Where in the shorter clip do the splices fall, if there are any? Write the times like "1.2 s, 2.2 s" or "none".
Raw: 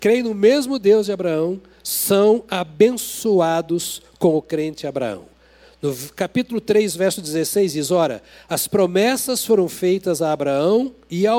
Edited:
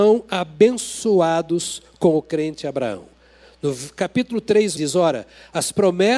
4.8 s

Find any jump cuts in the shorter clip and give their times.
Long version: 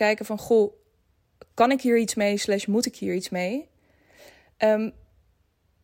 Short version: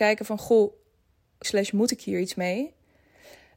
1.4 s

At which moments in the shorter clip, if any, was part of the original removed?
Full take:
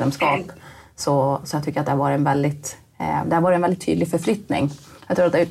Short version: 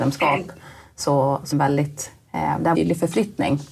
1.5 s, 2.7 s

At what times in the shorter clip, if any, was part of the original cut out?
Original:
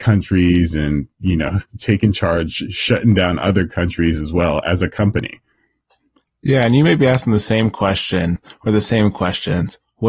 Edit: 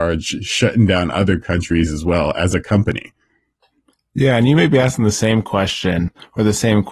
none

